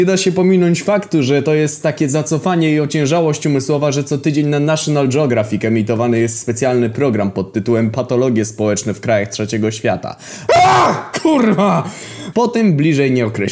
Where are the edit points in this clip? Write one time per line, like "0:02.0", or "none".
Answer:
0:10.5
0:12.3